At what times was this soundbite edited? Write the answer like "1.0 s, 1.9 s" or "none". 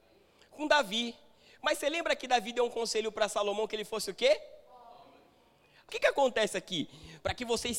5.9 s